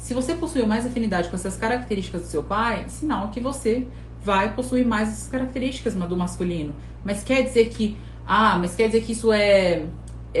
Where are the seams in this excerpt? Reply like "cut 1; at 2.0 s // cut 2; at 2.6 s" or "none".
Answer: none